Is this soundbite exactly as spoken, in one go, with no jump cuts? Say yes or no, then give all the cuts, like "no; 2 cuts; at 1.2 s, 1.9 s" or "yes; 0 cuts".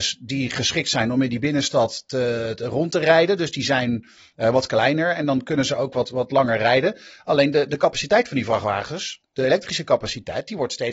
yes; 0 cuts